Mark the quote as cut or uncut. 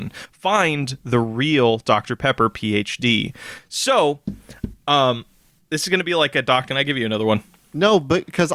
cut